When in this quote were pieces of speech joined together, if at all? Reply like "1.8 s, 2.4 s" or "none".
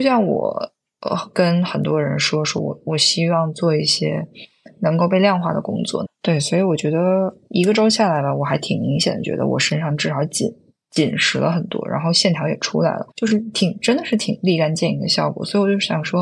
6.0 s, 13.1 s